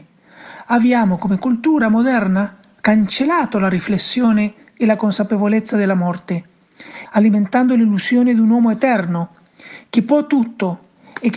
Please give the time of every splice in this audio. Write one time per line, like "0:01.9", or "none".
0:07.1